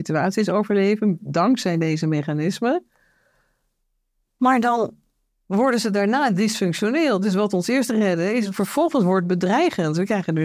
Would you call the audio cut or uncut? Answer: uncut